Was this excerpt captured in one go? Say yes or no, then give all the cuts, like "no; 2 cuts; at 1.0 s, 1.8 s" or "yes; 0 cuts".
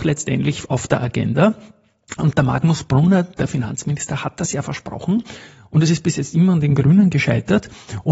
yes; 0 cuts